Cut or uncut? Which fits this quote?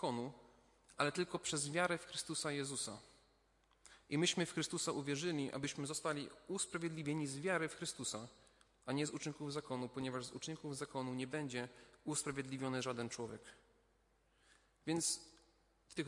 uncut